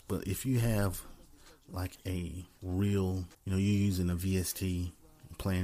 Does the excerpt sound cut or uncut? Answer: cut